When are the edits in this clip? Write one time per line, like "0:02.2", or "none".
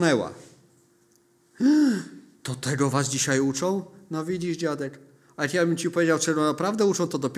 none